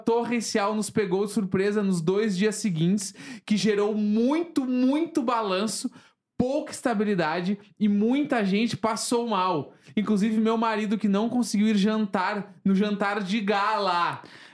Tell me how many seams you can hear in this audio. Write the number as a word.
one